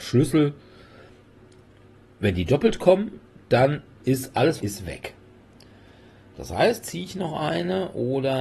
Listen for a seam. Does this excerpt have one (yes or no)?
yes